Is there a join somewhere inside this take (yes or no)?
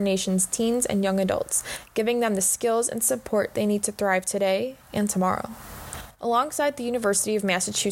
no